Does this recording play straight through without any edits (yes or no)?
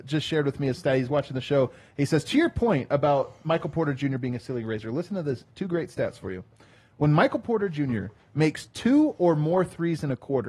yes